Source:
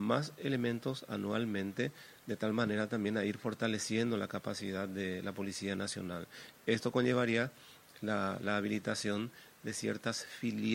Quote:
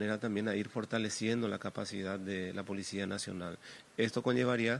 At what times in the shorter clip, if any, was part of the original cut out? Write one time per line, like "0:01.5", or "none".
none